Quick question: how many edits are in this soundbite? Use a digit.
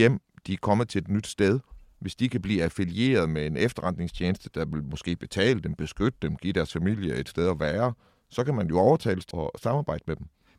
1